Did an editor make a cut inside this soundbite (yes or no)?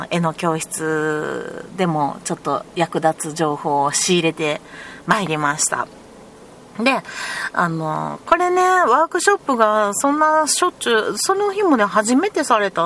no